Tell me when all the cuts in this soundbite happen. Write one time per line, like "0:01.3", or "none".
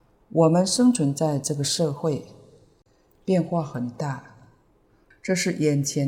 0:05.1

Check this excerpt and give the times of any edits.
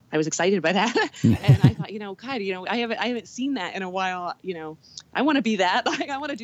none

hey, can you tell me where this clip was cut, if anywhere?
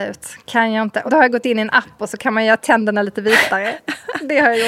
0:01.1

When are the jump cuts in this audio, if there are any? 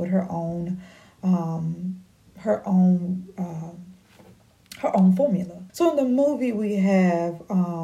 0:05.7

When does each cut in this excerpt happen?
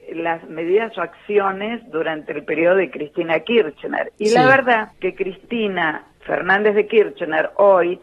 0:04.9
0:06.1

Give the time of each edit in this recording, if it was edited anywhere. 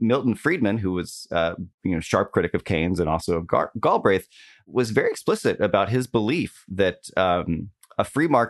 0:01.7

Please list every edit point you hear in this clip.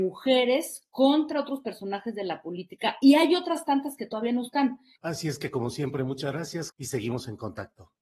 0:05.0
0:06.7

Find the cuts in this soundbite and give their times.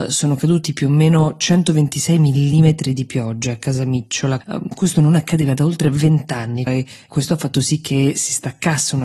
0:04.4
0:06.7

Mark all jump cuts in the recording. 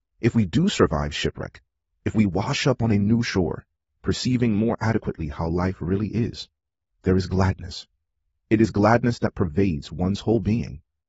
none

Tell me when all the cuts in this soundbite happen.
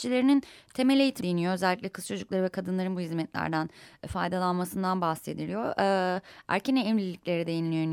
0:01.2

